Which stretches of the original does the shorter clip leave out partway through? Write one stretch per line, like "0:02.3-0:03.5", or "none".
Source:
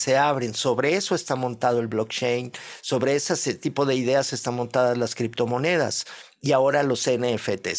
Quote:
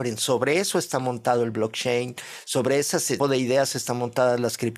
0:03.6-0:03.8